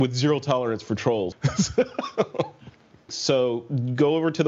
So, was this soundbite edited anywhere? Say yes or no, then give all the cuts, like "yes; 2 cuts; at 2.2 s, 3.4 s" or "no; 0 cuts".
yes; 2 cuts; at 1.3 s, 3.1 s